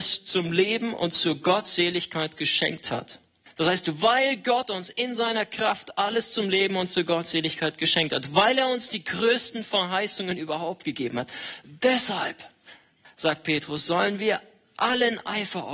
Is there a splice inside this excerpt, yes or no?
yes